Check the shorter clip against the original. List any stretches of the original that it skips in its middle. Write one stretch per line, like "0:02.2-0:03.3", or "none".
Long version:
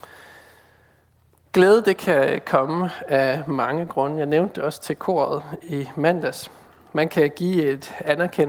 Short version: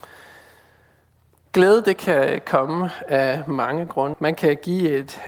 0:04.1-0:06.9

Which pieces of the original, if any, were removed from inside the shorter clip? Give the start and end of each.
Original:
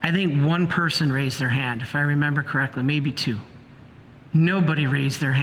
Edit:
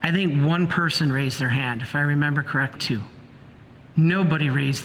0:02.8-0:03.1

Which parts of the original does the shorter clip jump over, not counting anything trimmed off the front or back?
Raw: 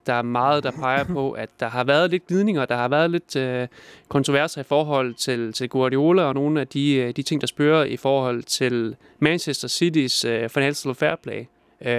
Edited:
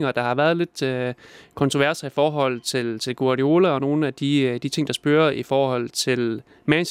none

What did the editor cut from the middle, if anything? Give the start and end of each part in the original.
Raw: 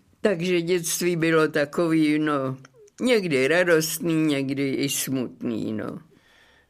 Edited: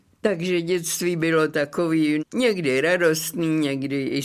0:02.2-0:02.9

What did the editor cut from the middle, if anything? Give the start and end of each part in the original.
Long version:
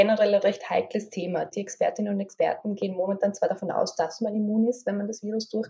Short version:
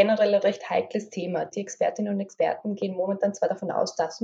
none

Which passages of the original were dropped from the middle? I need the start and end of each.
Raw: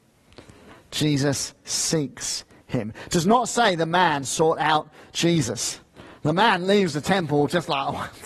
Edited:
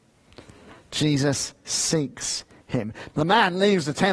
0:03.1-0:06.2

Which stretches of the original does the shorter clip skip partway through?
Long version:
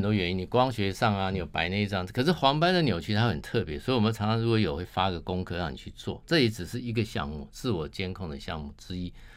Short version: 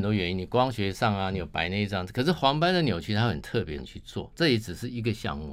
0:03.8-0:05.7

